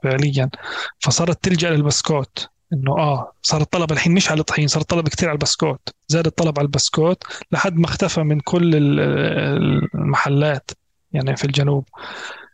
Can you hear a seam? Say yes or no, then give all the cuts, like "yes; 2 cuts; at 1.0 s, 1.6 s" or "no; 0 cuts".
yes; 1 cut; at 6.0 s